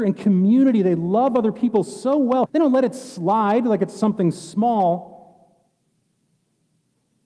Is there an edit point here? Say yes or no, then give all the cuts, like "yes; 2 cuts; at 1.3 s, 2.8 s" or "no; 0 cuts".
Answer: yes; 1 cut; at 2.5 s